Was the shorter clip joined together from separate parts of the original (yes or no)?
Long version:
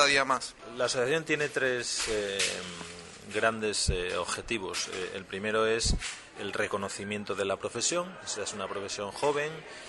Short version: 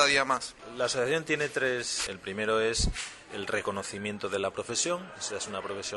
yes